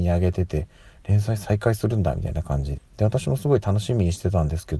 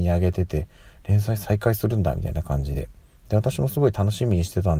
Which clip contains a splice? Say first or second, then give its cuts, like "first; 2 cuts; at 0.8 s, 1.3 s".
first; 1 cut; at 2.7 s